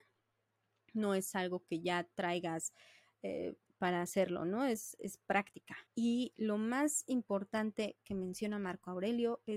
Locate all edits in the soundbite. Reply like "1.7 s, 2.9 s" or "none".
3.7 s, 5.9 s